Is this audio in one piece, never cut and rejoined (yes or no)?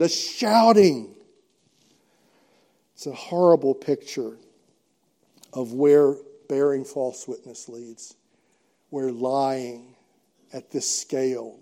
yes